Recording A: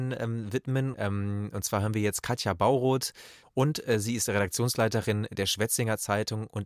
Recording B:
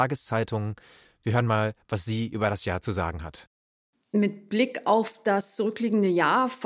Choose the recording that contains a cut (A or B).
A